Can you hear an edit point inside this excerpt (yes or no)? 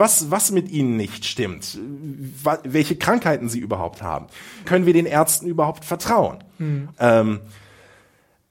yes